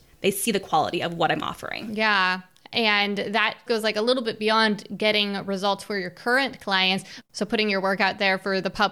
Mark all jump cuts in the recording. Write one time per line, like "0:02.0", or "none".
0:03.7
0:07.2